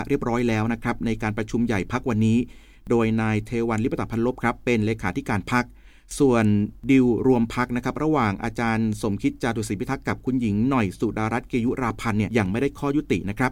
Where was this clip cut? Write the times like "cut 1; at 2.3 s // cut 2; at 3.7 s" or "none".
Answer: cut 1; at 12.3 s

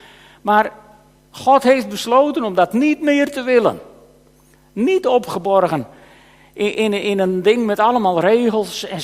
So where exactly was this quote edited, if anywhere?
none

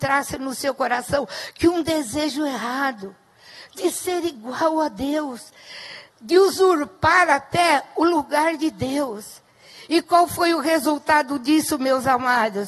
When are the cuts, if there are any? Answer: cut 1; at 6.1 s

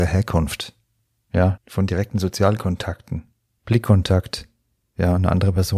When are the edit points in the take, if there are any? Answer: cut 1; at 1.6 s // cut 2; at 3.6 s

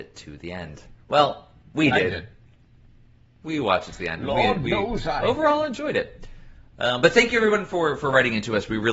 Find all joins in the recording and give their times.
none

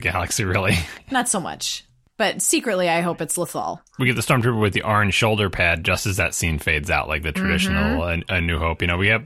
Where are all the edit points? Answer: none

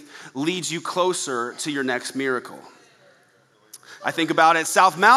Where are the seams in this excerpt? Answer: cut 1; at 4.0 s

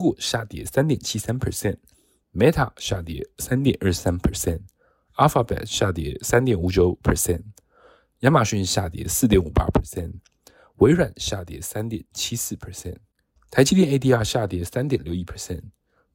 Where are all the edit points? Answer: cut 1; at 13.4 s

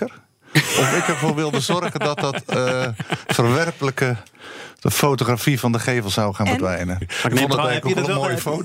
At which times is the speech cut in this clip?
cut 1; at 7.0 s

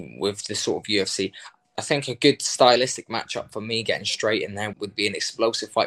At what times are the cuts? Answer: cut 1; at 1.8 s // cut 2; at 4.7 s

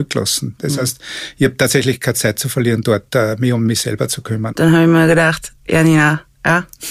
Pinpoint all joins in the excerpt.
cut 1; at 4.5 s

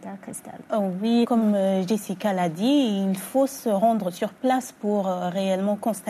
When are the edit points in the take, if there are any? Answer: cut 1; at 1.2 s

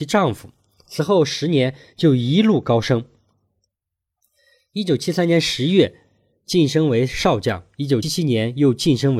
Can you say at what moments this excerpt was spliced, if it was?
cut 1; at 8.0 s

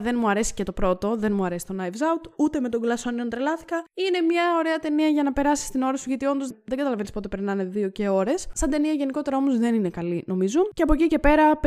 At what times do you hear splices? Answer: cut 1; at 6.5 s

